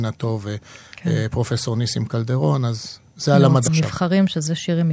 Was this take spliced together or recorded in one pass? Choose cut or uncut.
cut